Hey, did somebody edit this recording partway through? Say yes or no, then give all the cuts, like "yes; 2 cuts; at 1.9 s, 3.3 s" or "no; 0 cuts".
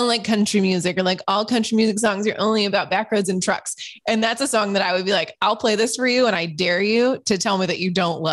no; 0 cuts